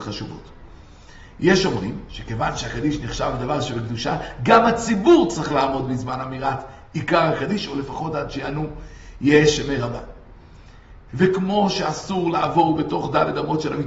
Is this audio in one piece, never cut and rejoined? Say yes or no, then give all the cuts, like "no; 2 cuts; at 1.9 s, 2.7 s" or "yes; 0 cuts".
no; 1 cut; at 11.1 s